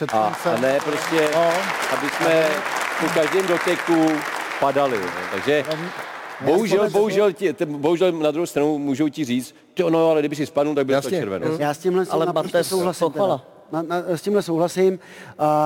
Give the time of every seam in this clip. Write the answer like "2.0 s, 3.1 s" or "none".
none